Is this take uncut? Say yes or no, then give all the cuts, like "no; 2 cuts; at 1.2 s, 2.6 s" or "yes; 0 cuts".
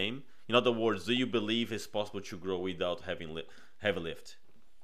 yes; 0 cuts